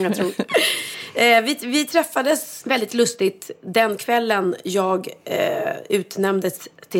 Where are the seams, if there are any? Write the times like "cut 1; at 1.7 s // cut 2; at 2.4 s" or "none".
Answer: cut 1; at 2.6 s

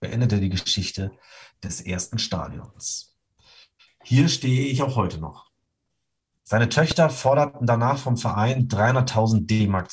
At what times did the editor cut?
cut 1; at 3.9 s // cut 2; at 6.4 s

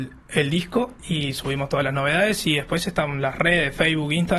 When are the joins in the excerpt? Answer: cut 1; at 1.0 s

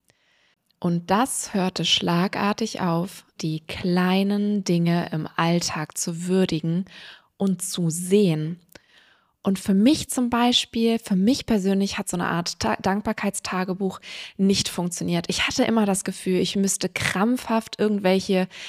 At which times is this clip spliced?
cut 1; at 3.4 s

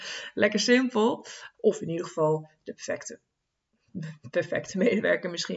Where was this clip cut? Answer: cut 1; at 1.5 s

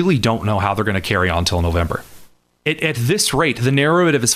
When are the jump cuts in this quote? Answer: cut 1; at 2.6 s

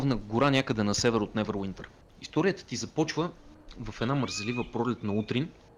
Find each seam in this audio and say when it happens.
cut 1; at 2.0 s

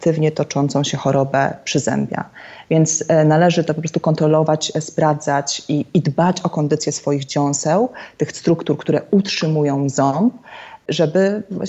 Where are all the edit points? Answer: none

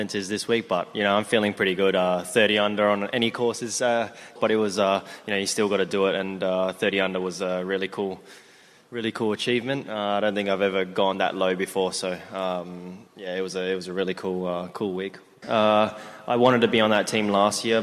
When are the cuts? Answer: cut 1; at 4.4 s // cut 2; at 15.4 s

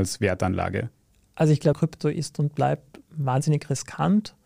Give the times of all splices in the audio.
cut 1; at 1.7 s

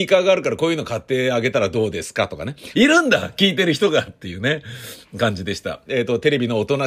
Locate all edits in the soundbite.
cut 1; at 2.7 s // cut 2; at 5.9 s

